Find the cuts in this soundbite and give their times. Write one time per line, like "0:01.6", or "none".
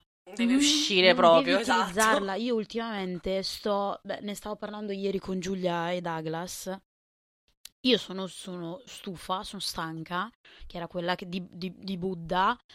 0:07.7
0:10.6